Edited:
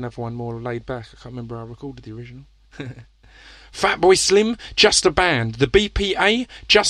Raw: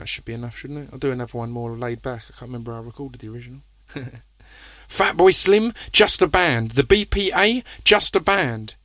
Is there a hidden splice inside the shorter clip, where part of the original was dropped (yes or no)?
no